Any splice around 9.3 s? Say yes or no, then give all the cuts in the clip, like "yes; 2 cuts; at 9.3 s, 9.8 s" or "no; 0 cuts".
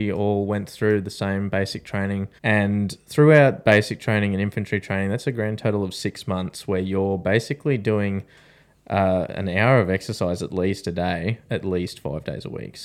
no; 1 cut; at 2.4 s